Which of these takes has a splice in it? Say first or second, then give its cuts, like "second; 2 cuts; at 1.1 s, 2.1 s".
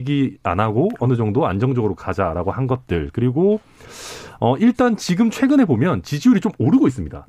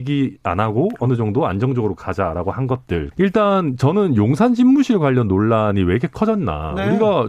second; 1 cut; at 3.1 s